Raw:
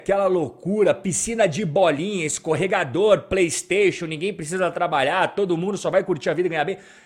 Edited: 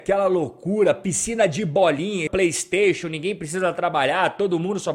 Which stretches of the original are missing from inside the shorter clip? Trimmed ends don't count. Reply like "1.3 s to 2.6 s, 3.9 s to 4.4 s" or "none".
2.3 s to 3.3 s